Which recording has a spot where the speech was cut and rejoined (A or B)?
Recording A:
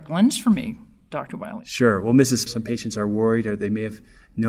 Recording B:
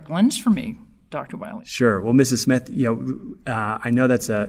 A